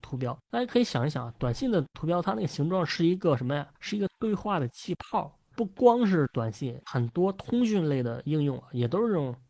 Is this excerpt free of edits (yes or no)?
yes